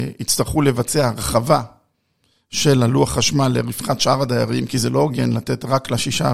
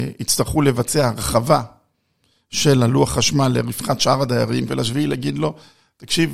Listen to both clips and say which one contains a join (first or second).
second